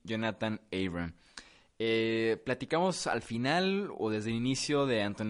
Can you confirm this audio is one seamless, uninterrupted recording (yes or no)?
yes